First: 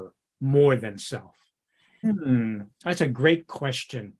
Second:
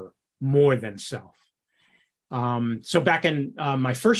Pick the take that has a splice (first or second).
first